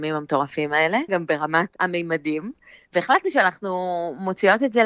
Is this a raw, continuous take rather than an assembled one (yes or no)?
no